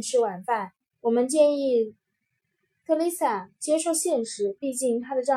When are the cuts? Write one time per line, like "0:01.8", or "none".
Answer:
0:00.9